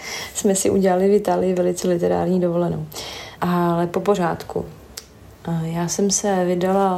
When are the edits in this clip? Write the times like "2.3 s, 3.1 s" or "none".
3.4 s